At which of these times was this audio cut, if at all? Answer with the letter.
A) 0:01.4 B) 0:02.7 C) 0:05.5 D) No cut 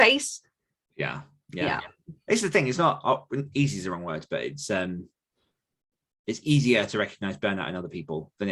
D